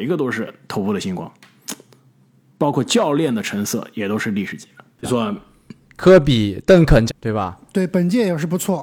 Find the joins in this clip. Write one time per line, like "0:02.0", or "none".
0:05.0
0:07.1